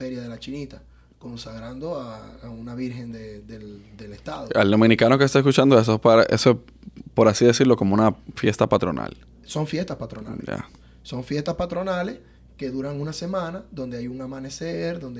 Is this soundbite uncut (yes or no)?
yes